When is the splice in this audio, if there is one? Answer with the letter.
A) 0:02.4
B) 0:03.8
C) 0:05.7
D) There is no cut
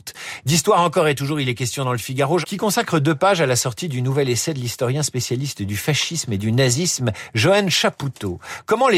A